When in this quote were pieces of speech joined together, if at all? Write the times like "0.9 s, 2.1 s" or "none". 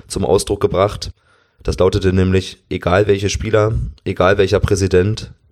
none